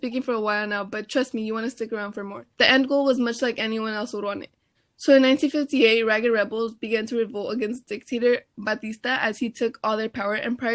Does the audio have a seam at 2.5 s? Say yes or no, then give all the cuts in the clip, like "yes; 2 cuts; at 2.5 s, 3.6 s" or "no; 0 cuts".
yes; 2 cuts; at 2.5 s, 4.7 s